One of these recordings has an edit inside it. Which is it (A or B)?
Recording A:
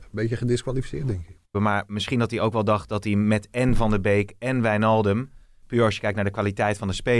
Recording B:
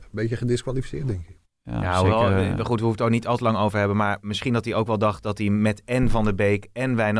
A